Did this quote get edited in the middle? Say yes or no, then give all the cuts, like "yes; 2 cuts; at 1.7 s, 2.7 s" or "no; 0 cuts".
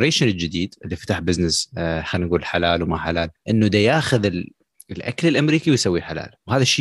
yes; 1 cut; at 3.4 s